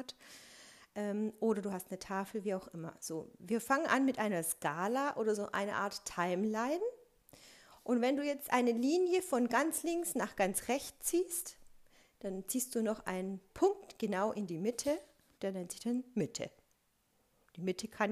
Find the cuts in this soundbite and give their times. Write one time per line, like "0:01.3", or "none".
0:15.3